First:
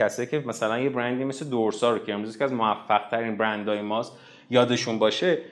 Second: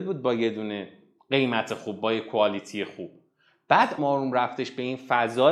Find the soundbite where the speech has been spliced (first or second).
second